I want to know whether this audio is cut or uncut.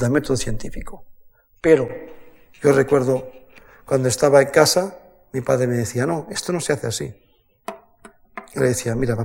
uncut